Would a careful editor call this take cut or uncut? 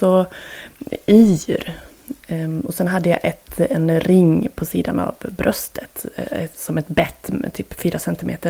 uncut